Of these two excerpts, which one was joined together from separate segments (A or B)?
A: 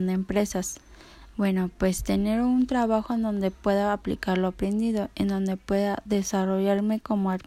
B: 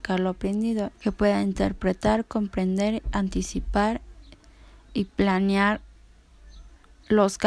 B